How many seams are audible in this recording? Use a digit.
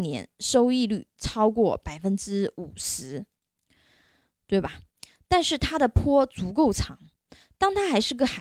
1